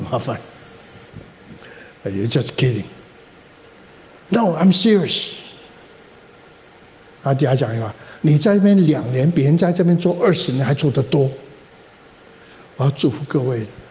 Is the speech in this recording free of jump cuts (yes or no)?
yes